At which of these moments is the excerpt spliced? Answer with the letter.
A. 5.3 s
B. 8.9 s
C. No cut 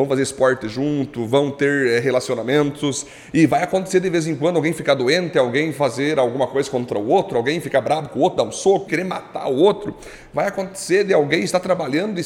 B